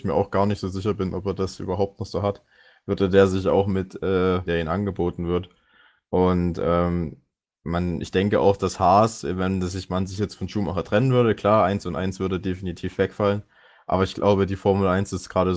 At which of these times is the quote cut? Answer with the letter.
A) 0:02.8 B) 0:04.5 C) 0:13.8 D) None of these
B